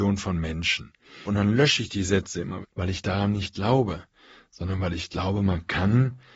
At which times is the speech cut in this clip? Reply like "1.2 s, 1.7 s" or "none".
1.2 s, 2.6 s